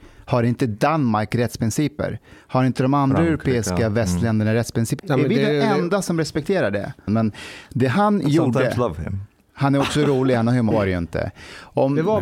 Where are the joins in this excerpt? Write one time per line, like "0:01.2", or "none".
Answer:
0:05.0
0:07.1
0:10.7